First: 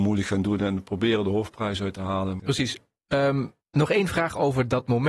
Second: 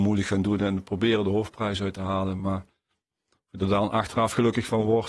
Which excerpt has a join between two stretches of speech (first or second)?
first